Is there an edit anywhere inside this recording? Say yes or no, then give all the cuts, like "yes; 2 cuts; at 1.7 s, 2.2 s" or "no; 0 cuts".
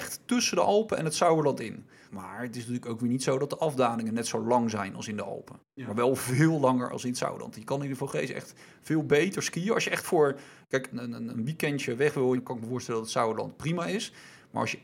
yes; 3 cuts; at 2.1 s, 10.9 s, 12.3 s